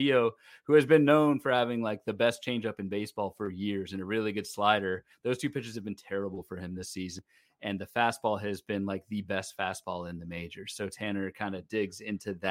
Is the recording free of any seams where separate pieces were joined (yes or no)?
yes